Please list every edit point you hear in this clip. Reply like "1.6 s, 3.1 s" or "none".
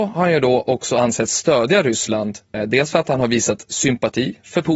2.5 s